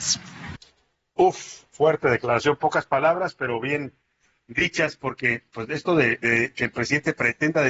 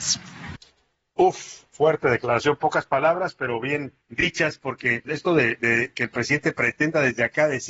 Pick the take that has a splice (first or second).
second